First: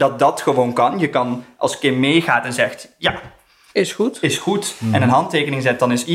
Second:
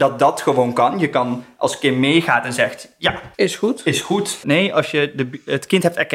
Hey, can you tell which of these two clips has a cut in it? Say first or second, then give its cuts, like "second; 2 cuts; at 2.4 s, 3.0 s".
second; 2 cuts; at 3.3 s, 4.4 s